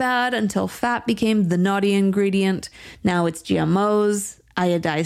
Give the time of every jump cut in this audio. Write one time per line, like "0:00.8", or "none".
0:02.9